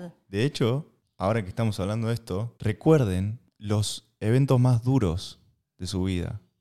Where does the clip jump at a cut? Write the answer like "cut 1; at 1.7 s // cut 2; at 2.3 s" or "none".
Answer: cut 1; at 2.6 s